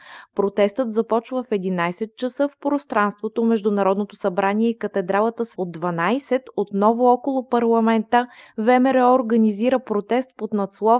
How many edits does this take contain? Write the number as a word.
one